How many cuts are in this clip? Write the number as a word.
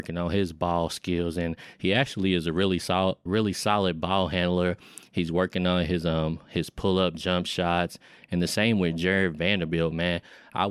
one